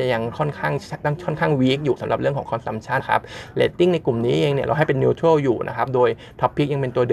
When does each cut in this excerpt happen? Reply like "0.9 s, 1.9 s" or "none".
3.0 s